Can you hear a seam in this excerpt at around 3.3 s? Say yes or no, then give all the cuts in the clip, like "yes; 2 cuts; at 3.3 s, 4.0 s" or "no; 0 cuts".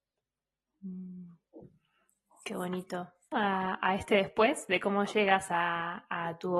yes; 1 cut; at 3.3 s